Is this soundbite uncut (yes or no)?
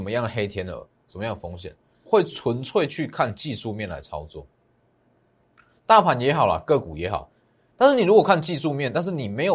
no